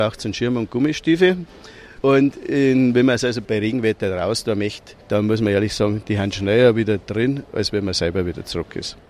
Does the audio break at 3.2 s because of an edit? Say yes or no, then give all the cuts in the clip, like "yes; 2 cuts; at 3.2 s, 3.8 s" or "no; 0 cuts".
no; 1 cut; at 5.0 s